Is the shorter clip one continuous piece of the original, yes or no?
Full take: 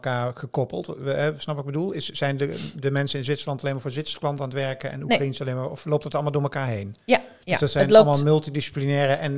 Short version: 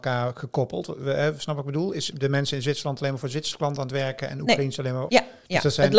no